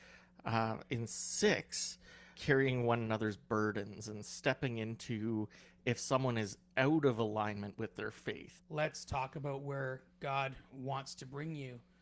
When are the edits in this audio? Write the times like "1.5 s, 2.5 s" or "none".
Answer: 2.3 s, 8.6 s